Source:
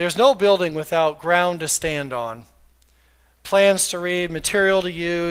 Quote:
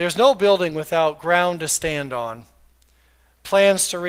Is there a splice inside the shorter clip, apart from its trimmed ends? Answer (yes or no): no